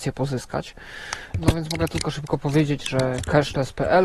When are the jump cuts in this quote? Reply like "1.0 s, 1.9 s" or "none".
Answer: 1.3 s